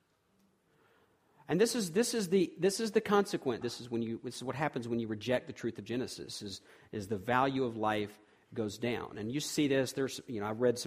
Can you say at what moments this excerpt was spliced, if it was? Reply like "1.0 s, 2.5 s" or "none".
3.6 s